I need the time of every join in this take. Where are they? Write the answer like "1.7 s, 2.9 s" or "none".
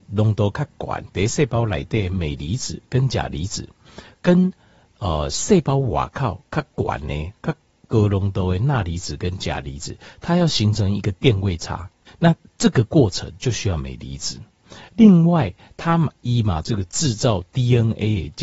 12.1 s, 16.6 s